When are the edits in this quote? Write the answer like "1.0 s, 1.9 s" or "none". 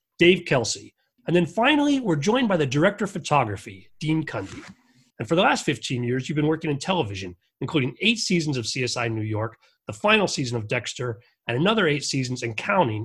1.2 s, 5.1 s